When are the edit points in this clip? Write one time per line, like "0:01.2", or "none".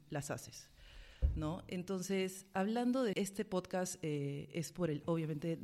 0:03.1